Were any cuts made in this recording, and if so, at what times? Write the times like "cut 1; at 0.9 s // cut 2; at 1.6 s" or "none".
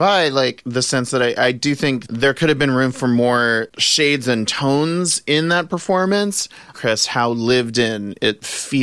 cut 1; at 6.7 s